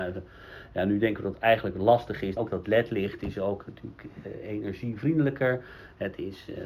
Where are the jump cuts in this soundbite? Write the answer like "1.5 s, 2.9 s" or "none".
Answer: 1.3 s, 2.4 s